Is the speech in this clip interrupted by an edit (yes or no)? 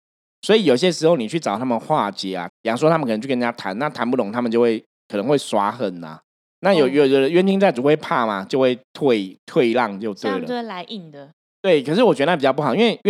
yes